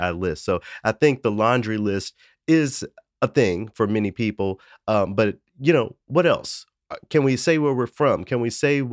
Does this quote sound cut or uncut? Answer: cut